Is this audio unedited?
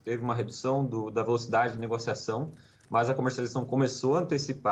yes; 0 cuts

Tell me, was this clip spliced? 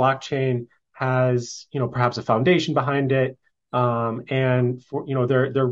no; 0 cuts

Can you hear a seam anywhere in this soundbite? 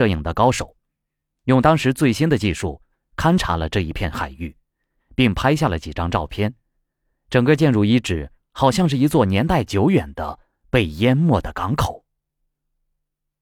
yes; 1 cut; at 7.1 s

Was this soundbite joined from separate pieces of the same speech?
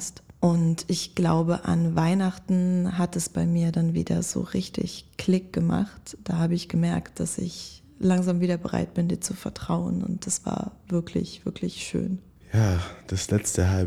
no; 0 cuts

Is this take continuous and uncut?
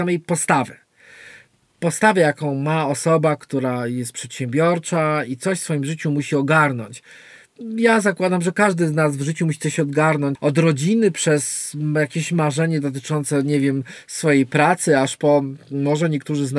no; 1 cut; at 10.4 s

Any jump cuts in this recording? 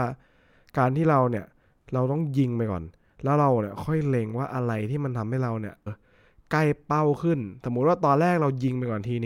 yes; 1 cut; at 5.9 s

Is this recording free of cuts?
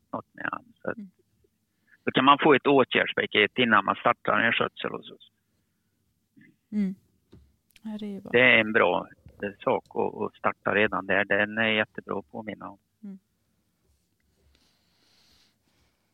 yes; 0 cuts

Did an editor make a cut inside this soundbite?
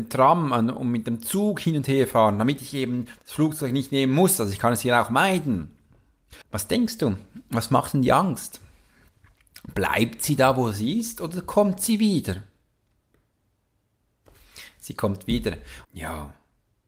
yes; 2 cuts; at 6.4 s, 15.8 s

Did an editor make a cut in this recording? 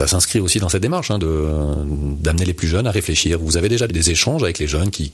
yes; 1 cut; at 3.9 s

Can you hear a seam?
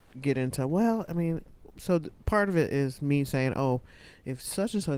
no; 0 cuts

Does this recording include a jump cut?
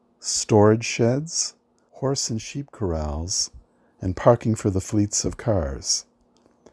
yes; 1 cut; at 1.9 s

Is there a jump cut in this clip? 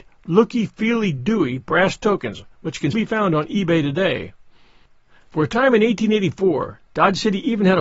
yes; 2 cuts; at 2.9 s, 6.8 s

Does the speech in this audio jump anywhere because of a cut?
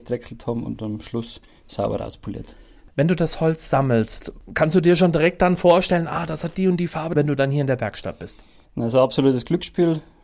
yes; 1 cut; at 7.1 s

